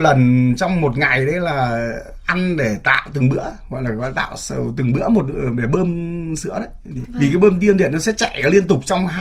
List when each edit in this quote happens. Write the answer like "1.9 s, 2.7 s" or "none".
7.0 s